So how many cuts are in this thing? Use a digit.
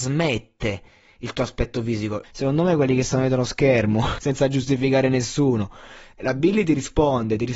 2